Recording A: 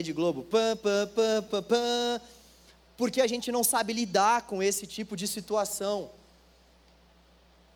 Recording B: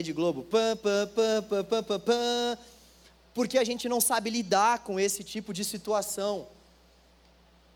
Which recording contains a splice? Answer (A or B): A